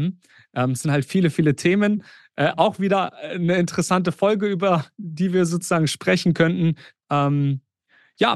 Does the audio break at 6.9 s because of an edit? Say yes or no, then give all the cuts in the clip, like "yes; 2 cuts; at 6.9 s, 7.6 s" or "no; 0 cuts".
yes; 1 cut; at 6.9 s